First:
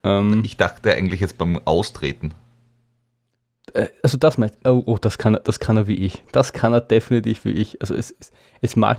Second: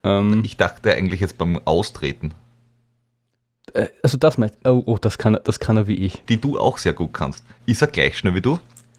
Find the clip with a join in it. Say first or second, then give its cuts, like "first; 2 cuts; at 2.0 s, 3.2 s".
second; 1 cut; at 6.3 s